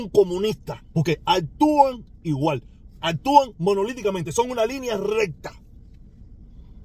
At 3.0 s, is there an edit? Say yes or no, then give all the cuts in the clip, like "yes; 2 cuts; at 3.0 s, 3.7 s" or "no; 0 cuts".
yes; 2 cuts; at 0.9 s, 3.0 s